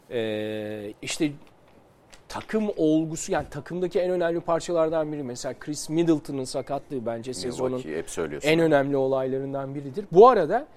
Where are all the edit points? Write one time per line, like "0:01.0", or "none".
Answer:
0:00.9
0:02.2

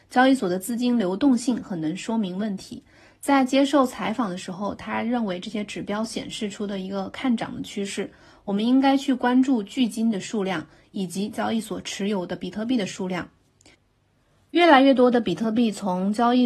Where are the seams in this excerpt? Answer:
none

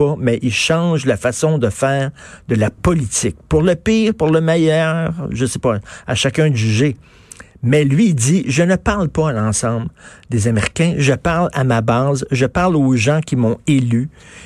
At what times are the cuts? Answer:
none

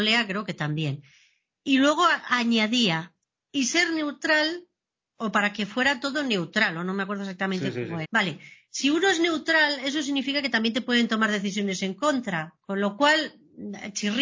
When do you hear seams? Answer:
0:08.0

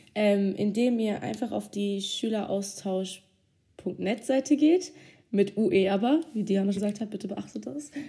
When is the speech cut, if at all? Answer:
0:06.7

